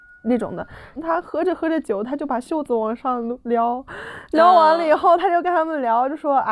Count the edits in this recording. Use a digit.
1